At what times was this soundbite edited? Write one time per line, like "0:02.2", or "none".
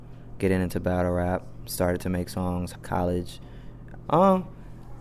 0:02.7
0:04.1